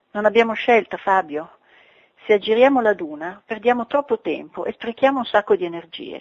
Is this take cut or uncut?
uncut